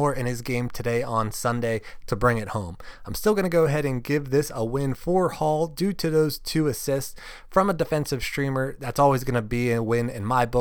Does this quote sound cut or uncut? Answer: uncut